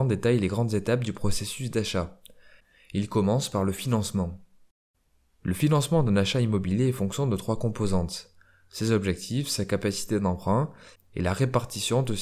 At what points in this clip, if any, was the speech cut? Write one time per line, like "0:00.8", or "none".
none